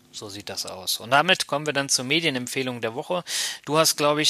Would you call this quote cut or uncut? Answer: uncut